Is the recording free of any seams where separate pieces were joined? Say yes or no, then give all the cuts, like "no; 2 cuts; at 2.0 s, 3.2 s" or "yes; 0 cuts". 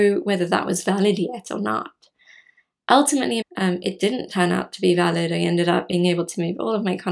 no; 1 cut; at 3.4 s